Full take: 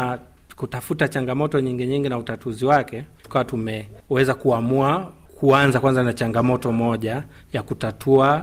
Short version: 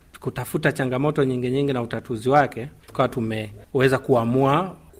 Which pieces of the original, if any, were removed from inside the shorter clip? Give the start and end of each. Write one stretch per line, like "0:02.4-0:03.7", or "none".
none

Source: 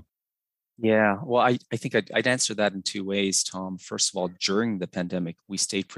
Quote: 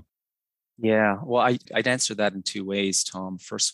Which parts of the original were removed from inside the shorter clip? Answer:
0:01.7-0:02.0

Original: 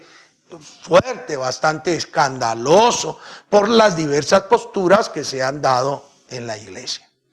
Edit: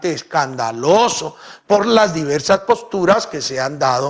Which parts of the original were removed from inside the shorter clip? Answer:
none

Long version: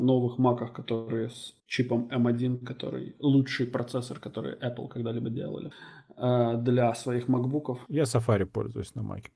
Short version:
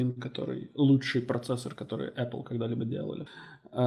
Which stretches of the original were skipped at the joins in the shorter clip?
none

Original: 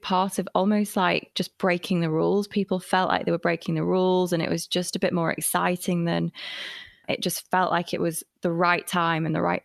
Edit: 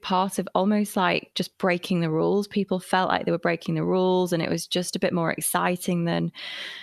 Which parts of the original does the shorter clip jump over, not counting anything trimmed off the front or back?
none

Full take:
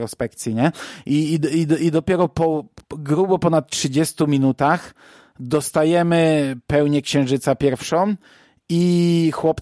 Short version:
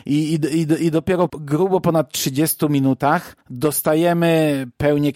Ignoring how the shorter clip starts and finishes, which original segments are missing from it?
0:02.3-0:02.9
0:05.0-0:05.3

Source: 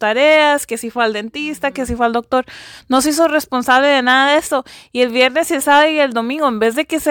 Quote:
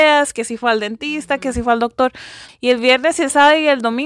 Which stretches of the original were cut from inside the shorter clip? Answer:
0:02.8-0:04.8

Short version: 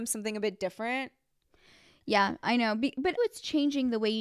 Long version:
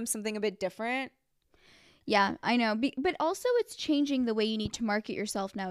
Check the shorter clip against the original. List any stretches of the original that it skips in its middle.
0:03.2-0:03.5

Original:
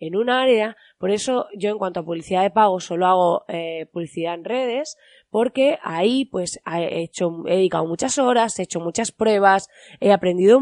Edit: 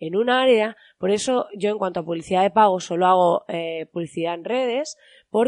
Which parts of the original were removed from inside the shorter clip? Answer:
none

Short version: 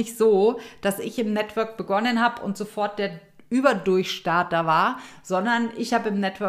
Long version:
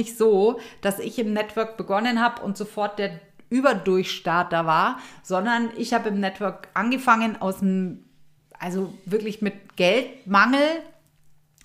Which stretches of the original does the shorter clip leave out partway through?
none

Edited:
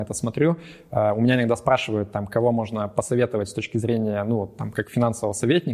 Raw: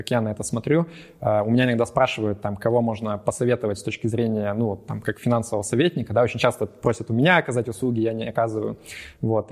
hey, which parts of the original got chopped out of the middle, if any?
none

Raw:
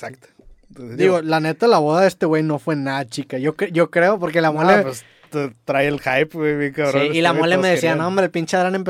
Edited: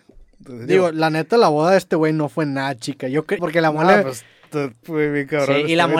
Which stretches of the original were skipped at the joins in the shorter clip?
0:03.7-0:04.2
0:05.6-0:06.3

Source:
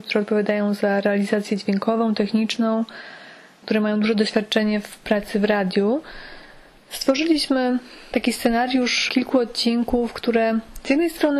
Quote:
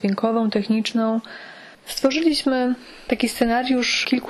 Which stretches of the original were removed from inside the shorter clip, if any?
0:03.4-0:06.8

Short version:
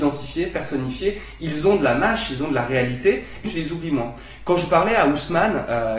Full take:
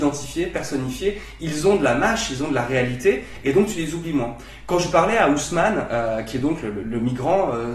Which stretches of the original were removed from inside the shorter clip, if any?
0:03.4-0:03.7

